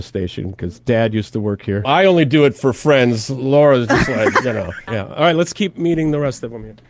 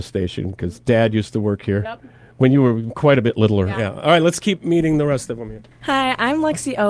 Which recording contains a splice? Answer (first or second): first